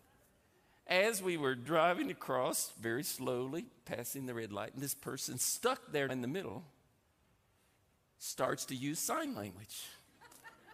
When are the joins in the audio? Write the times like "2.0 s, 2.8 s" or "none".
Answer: 6.1 s

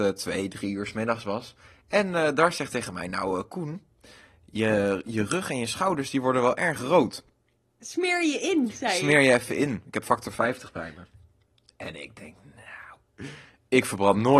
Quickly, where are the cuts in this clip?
none

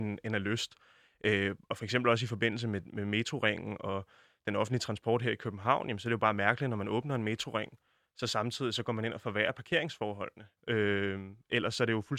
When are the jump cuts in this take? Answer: 10.6 s

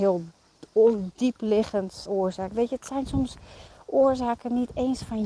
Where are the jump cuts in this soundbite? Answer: 2.0 s

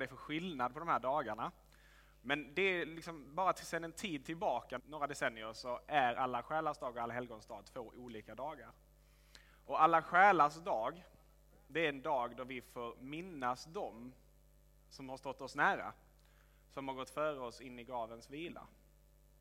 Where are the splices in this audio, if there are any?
4.8 s

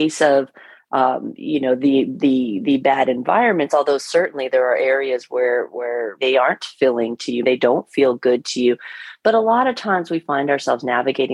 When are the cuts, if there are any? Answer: 6.2 s, 7.4 s

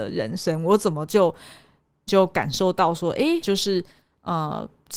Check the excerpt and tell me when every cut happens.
2.1 s, 3.4 s

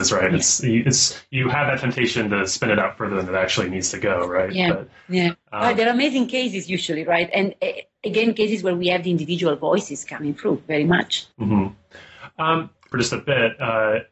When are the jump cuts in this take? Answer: 11.3 s, 12.9 s

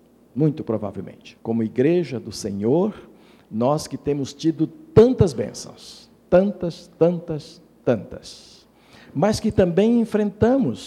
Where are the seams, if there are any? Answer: 1.4 s

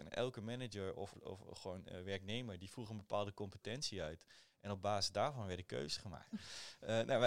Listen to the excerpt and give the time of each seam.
1.1 s, 6.3 s

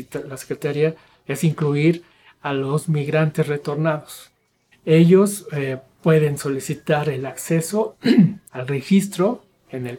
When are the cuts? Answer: 4.7 s, 8.5 s

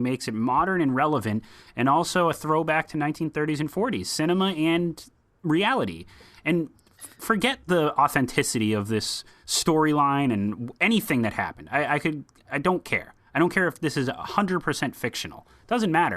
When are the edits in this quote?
none

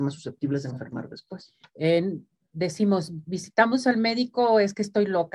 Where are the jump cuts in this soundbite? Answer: 1.6 s

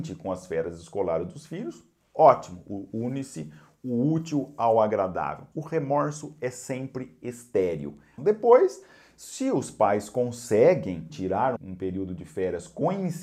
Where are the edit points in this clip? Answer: 5.5 s, 8.2 s, 11.6 s

